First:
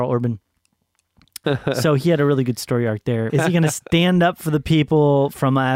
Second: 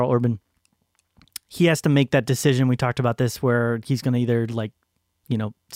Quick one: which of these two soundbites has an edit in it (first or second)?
first